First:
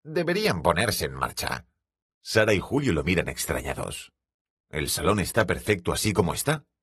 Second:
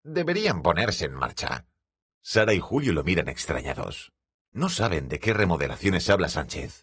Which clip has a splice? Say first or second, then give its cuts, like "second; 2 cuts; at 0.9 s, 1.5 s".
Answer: first; 1 cut; at 4.5 s